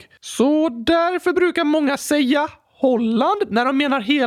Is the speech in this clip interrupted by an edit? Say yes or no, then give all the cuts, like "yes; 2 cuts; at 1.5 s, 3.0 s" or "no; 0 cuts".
no; 0 cuts